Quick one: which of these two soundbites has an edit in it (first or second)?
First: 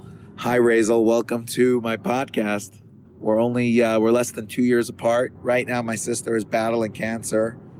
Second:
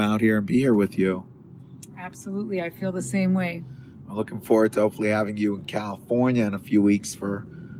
first